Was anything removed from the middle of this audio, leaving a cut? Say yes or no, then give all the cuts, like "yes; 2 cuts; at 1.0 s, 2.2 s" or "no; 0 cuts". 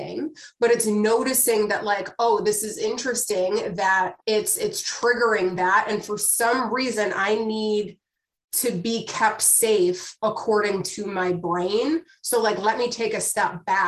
yes; 1 cut; at 4.2 s